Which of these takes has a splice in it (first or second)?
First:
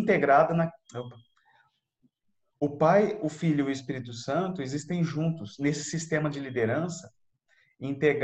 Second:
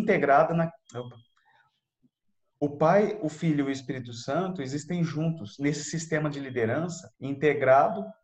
second